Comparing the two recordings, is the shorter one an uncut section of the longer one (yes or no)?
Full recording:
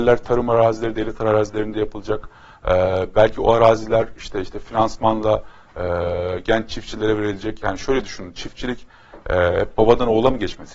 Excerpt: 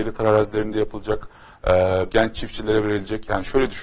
no